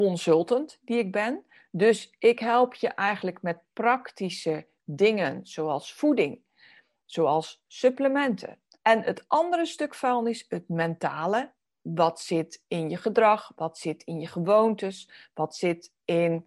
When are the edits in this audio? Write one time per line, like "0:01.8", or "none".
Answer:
0:08.8